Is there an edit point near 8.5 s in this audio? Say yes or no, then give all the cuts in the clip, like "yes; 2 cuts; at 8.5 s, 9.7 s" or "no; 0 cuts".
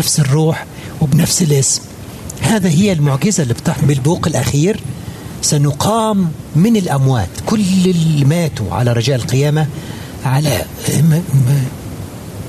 no; 1 cut; at 3.8 s